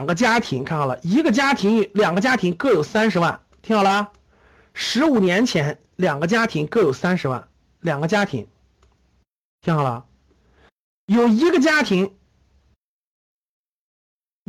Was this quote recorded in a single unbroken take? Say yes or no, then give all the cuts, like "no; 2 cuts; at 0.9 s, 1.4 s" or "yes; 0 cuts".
yes; 0 cuts